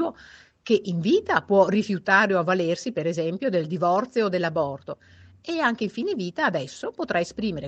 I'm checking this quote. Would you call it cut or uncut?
uncut